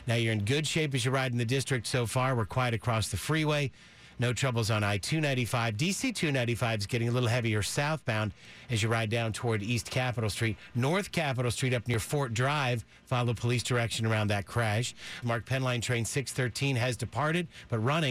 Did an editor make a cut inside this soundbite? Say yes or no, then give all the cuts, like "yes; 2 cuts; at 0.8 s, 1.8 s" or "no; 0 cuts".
yes; 1 cut; at 15.2 s